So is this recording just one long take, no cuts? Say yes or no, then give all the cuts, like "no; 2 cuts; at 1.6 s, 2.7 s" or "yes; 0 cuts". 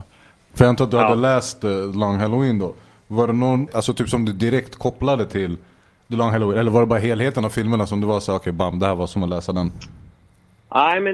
no; 1 cut; at 3.7 s